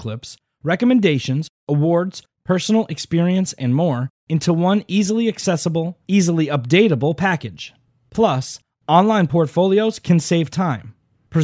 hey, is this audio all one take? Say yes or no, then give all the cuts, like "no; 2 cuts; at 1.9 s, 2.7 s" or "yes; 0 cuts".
yes; 0 cuts